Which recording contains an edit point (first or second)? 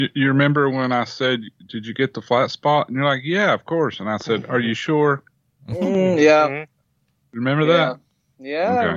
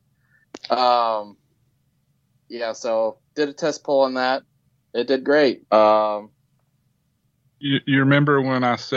second